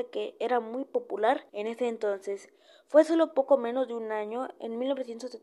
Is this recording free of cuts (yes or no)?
no